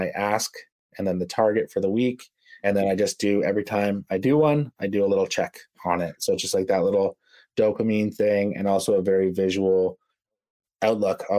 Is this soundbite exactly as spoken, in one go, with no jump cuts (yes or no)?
yes